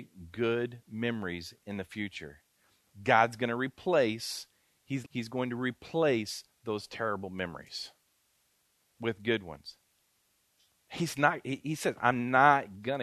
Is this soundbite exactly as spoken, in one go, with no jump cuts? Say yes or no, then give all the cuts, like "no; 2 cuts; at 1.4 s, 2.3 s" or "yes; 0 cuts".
no; 1 cut; at 5.0 s